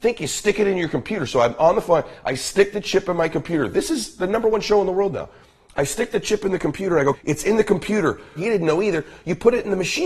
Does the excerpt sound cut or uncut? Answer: cut